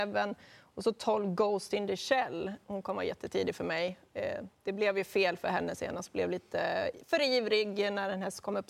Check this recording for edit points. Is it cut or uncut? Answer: uncut